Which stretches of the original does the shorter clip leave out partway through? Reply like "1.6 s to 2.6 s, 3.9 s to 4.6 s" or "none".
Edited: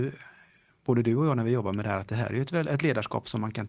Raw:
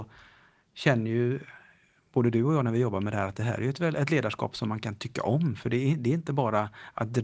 none